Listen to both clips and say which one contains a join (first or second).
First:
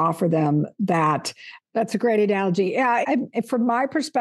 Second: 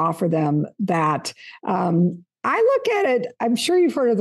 first